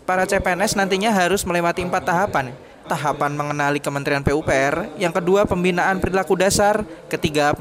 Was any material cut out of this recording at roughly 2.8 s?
yes; 1 cut; at 2.8 s

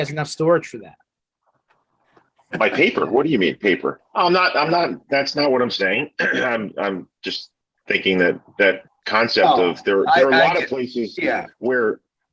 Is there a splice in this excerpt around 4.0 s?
yes; 1 cut; at 4.0 s

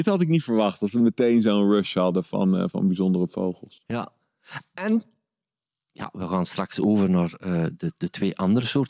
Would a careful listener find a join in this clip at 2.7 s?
yes; 1 cut; at 2.7 s

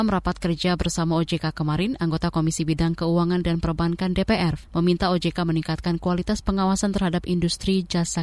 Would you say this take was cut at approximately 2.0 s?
no; 1 cut; at 4.6 s

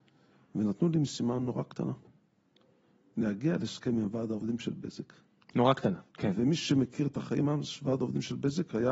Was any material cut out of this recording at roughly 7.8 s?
no; 1 cut; at 6.1 s

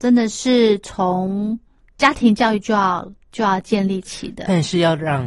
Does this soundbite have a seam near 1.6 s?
no; 0 cuts

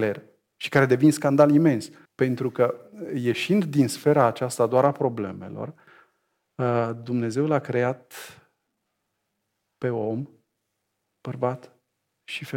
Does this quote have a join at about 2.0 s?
yes; 1 cut; at 2.0 s

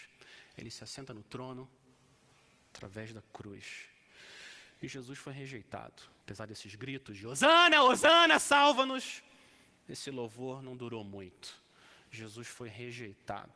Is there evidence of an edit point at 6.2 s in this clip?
yes; 1 cut; at 6.2 s

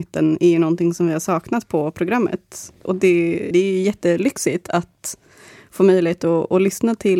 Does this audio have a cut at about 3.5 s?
yes; 1 cut; at 3.5 s

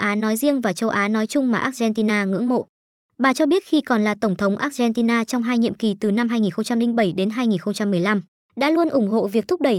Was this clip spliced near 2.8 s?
no; 0 cuts

